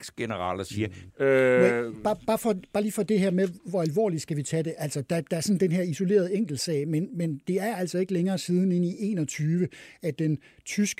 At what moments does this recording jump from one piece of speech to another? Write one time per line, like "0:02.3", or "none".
0:01.1